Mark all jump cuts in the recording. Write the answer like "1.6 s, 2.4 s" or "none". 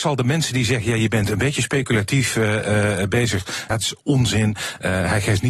3.7 s